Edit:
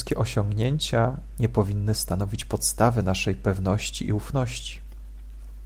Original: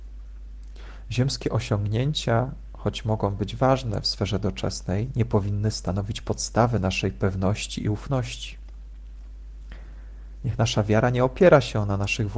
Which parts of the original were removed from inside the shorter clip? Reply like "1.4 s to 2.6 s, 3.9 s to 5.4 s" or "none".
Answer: 2.7 s to 5.1 s